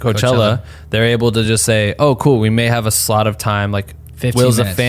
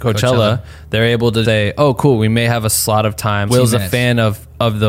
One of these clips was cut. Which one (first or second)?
second